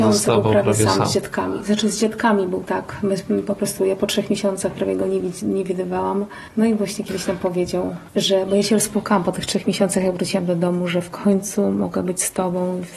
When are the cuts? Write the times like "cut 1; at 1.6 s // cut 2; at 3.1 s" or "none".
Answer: none